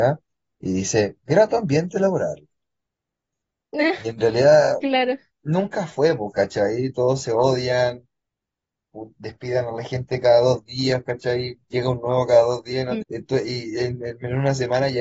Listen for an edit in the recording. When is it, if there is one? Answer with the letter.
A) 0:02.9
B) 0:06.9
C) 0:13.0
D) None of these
C